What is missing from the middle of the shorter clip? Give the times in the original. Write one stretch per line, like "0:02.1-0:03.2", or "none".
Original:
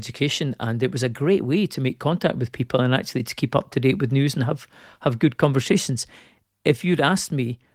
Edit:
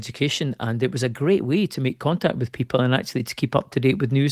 none